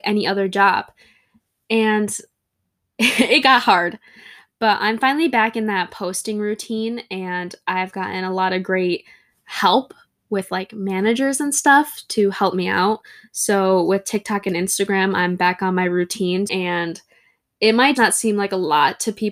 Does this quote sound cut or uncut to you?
cut